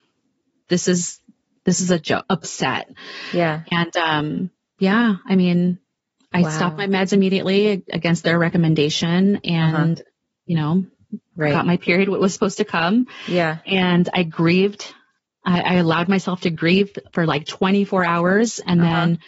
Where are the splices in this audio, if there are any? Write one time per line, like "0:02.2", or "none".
0:02.2